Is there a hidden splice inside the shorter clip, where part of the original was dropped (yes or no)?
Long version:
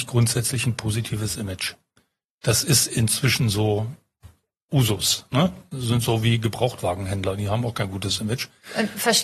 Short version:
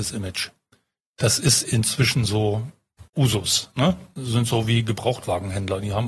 yes